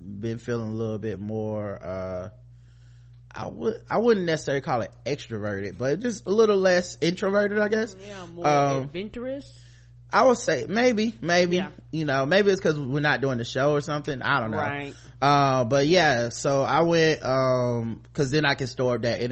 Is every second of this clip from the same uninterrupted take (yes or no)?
yes